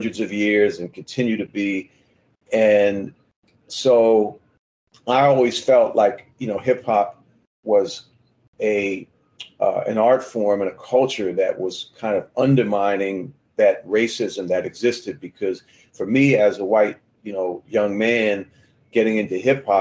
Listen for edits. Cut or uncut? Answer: uncut